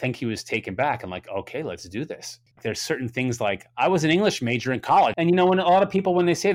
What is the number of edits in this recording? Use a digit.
2